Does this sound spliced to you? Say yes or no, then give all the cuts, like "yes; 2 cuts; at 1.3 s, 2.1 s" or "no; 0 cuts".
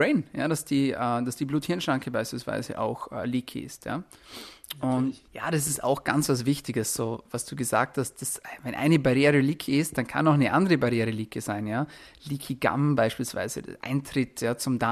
yes; 1 cut; at 5.3 s